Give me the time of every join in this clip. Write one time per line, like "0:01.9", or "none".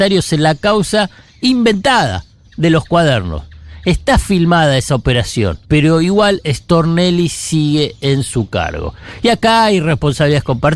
0:05.6